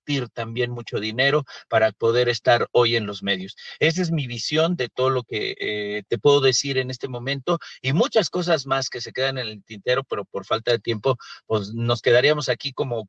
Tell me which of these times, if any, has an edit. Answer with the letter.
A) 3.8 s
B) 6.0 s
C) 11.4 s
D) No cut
B